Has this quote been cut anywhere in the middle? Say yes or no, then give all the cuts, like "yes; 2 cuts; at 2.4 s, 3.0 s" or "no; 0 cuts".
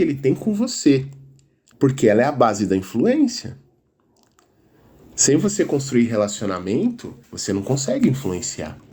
yes; 2 cuts; at 1.7 s, 7.2 s